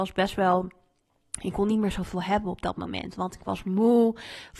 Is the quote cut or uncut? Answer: uncut